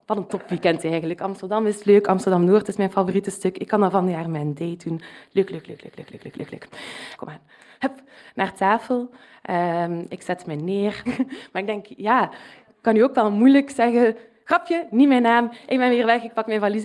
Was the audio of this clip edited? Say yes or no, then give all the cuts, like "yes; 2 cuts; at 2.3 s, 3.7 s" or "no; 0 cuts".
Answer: yes; 2 cuts; at 7.2 s, 11.1 s